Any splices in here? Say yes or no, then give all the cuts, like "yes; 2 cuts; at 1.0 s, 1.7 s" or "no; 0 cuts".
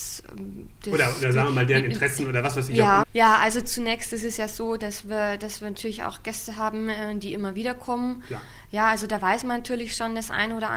yes; 1 cut; at 3.0 s